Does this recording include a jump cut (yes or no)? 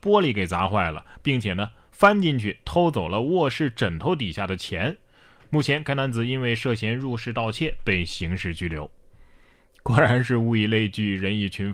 no